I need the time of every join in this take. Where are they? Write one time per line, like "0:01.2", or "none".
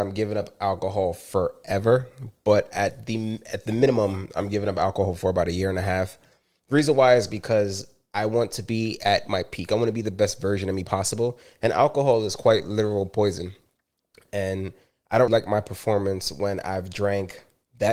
0:15.3